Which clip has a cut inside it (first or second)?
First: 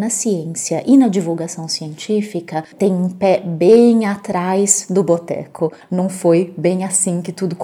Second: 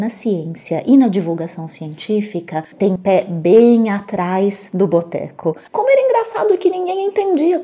second